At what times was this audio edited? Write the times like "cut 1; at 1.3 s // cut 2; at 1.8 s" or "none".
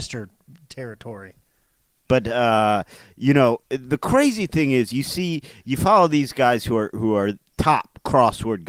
cut 1; at 2.0 s